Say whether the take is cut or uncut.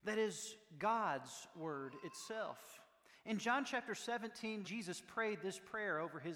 cut